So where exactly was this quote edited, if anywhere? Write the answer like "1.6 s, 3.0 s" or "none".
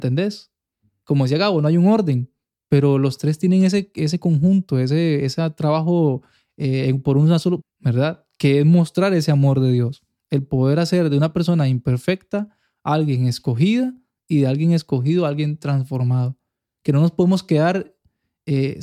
7.6 s